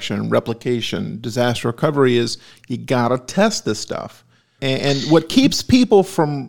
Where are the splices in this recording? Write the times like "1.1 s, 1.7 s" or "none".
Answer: 4.6 s